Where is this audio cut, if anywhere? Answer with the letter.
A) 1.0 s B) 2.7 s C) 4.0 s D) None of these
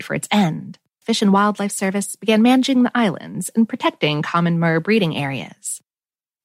A